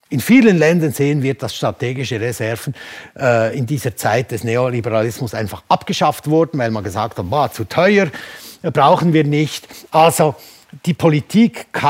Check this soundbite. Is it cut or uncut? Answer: uncut